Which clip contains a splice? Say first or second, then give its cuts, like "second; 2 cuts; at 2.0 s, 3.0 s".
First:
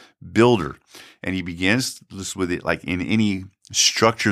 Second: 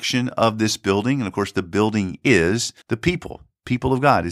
second; 1 cut; at 2.8 s